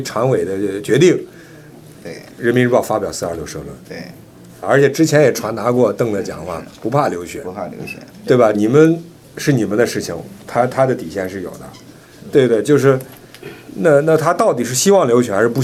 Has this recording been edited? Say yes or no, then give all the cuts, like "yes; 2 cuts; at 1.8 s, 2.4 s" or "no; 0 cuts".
yes; 2 cuts; at 4.6 s, 8.5 s